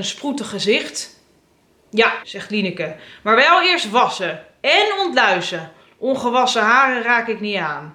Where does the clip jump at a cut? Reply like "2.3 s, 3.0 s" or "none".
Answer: 2.2 s